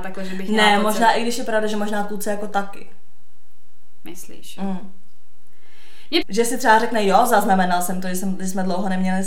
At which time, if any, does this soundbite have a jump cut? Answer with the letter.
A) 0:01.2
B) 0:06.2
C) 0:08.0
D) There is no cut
B